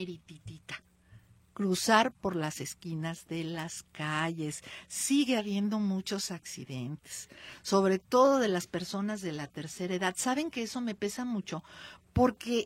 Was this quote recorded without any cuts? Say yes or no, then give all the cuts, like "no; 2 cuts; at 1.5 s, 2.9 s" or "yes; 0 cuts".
yes; 0 cuts